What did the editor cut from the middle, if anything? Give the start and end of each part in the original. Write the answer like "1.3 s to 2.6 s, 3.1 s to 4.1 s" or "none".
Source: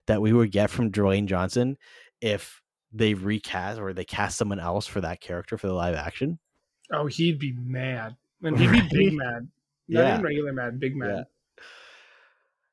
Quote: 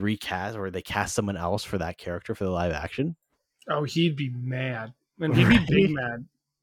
none

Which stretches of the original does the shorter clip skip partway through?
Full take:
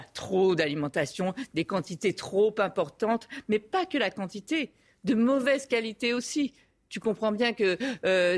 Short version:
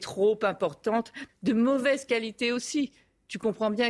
3.4 s to 4.9 s

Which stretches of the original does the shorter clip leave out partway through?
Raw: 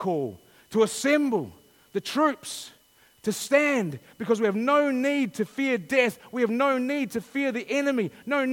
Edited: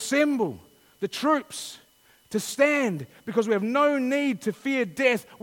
none

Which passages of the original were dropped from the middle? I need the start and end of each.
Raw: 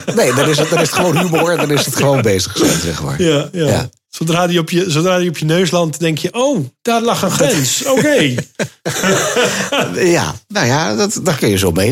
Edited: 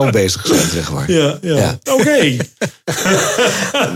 4.0 s to 7.8 s

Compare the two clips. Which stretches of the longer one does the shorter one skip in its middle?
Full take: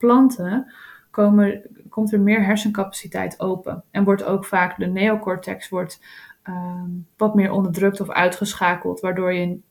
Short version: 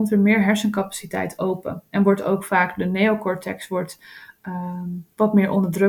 none

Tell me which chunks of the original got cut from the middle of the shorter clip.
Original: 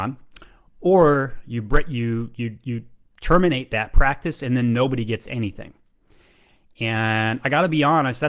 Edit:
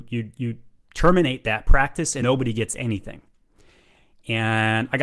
4.5 s to 4.7 s

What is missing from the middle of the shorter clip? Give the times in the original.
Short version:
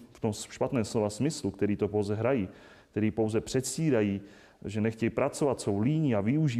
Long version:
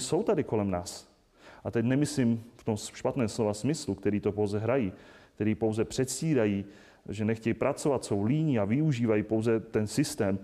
none

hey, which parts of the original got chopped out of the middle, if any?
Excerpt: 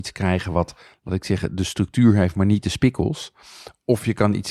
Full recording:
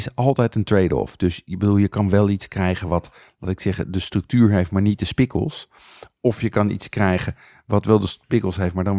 none

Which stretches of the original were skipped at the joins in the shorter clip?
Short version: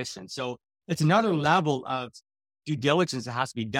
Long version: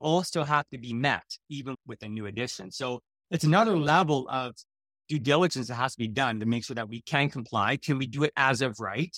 none

